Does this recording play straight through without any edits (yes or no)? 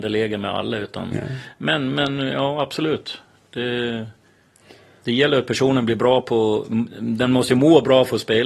yes